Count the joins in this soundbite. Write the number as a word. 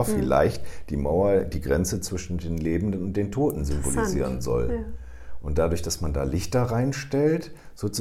zero